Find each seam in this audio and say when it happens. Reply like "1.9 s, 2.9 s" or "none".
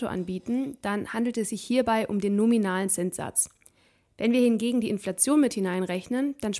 none